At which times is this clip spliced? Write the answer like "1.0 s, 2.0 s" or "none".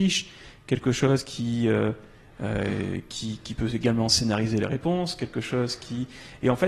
none